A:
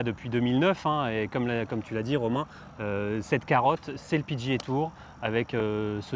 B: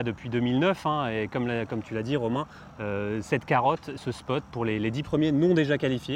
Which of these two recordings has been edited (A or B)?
B